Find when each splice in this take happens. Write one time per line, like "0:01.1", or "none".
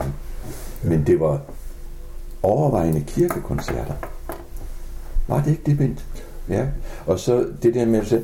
0:06.5